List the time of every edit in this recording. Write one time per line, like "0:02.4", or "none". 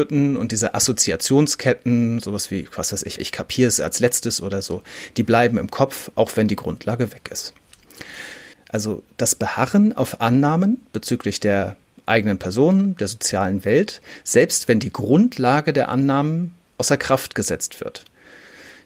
0:03.2
0:08.5